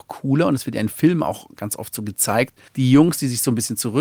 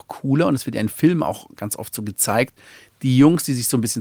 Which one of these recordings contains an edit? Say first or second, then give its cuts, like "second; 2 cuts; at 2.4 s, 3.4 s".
first; 1 cut; at 2.7 s